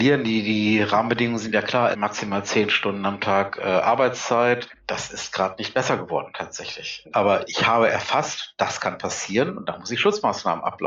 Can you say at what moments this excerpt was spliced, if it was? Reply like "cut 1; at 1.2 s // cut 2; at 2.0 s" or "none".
cut 1; at 1.9 s // cut 2; at 7.1 s